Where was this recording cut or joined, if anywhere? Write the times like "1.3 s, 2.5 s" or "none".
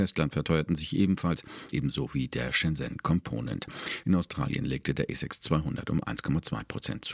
1.7 s, 4.0 s